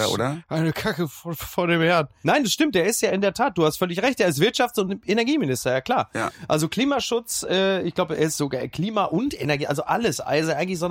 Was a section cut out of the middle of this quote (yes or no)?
yes